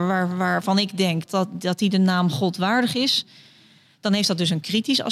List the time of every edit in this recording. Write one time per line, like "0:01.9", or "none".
0:01.3